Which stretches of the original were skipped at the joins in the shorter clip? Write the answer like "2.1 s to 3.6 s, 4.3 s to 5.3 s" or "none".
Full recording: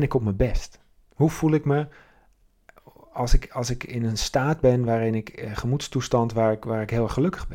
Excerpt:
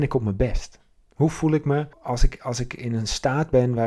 1.9 s to 3.0 s